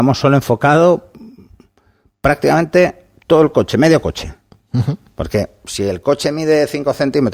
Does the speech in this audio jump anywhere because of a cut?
no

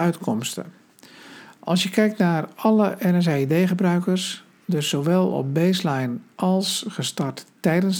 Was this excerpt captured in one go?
yes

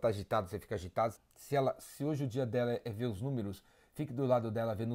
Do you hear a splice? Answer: yes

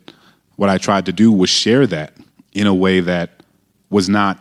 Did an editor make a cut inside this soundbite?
no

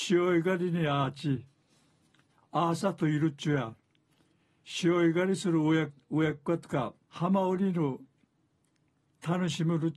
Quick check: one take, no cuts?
no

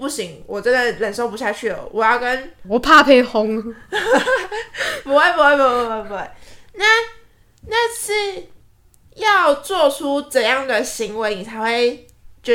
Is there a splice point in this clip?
yes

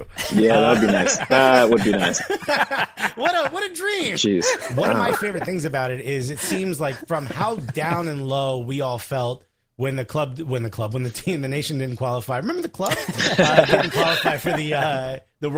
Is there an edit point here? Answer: no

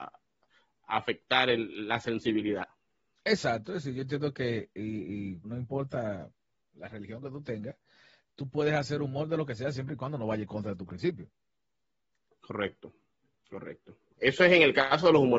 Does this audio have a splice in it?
yes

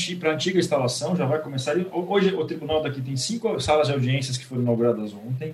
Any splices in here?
no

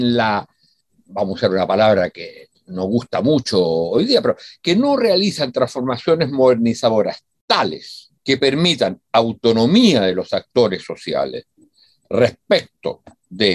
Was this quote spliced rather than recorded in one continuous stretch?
no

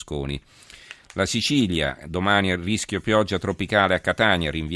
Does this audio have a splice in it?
no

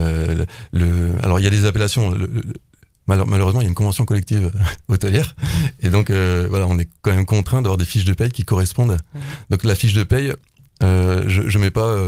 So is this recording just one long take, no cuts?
yes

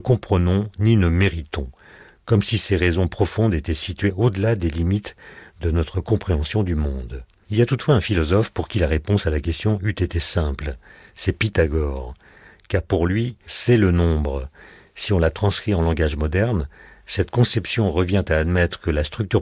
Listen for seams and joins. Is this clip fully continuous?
no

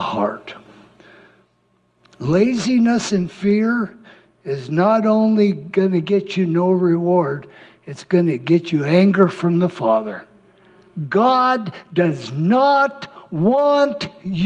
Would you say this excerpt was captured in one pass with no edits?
yes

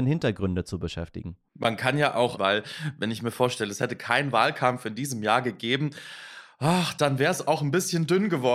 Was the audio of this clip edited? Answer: yes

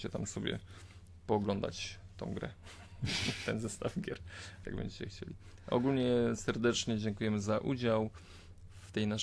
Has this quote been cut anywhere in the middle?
yes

